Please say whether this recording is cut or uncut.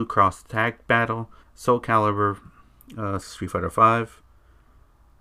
cut